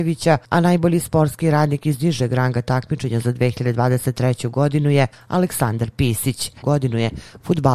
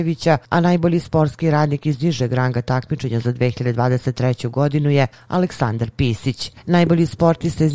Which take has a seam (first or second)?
first